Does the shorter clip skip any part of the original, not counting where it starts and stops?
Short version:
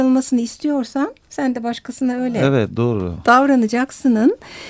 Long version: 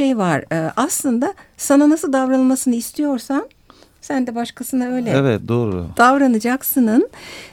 yes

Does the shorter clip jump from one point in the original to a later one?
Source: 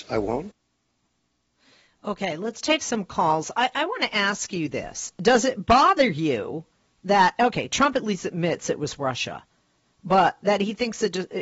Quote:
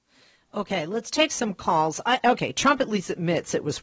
yes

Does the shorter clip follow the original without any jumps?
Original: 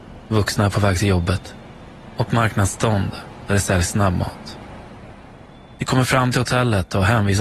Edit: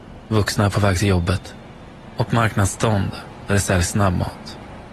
yes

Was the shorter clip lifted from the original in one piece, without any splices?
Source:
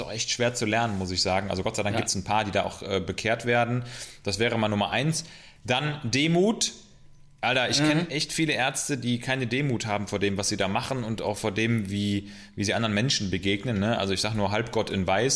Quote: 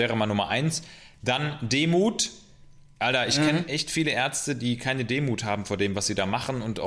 yes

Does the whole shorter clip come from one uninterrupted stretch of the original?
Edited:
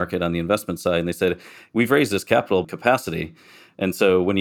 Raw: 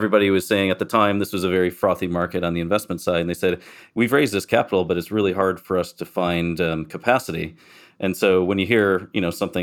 no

